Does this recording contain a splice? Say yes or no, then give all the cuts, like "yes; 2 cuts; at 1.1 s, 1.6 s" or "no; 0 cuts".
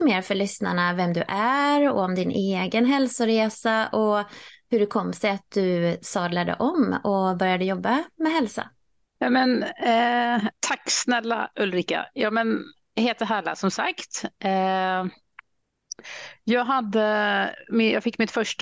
yes; 1 cut; at 9.2 s